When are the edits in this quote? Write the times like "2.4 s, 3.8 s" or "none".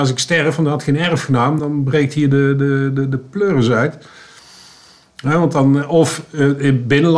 1.6 s